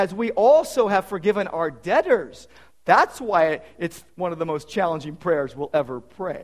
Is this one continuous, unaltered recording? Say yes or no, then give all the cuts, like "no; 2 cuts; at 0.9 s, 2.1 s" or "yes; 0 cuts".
yes; 0 cuts